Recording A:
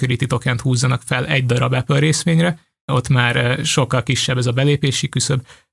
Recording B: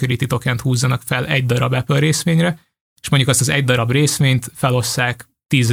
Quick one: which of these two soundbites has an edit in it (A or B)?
A